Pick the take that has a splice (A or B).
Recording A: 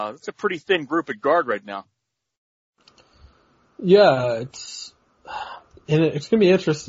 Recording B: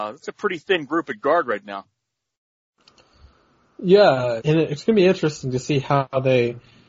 B